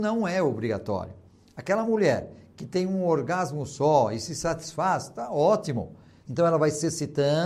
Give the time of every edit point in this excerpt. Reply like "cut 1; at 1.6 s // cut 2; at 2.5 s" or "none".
cut 1; at 6.2 s